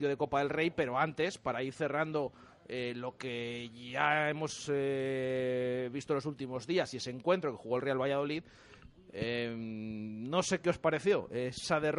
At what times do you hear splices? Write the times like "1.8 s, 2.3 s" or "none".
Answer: none